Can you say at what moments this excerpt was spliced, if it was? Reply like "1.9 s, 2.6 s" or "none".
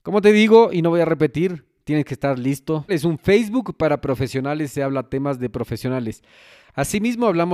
2.9 s